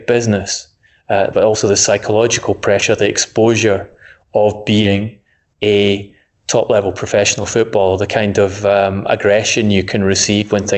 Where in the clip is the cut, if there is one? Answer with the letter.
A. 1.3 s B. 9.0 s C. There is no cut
A